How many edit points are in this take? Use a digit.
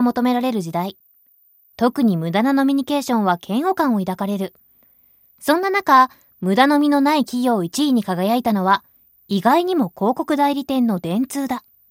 0